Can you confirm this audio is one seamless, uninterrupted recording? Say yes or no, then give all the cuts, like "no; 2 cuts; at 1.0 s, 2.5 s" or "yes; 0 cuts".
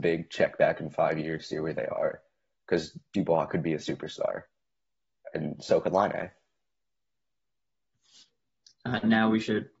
yes; 0 cuts